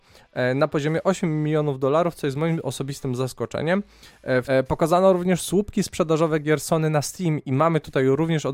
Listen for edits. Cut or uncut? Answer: cut